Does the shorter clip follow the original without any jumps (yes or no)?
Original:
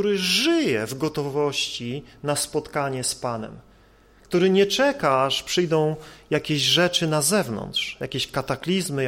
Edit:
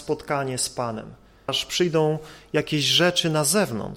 no